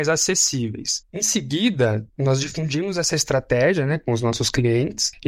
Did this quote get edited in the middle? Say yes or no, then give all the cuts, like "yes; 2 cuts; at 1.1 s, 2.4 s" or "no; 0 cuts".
yes; 1 cut; at 1.1 s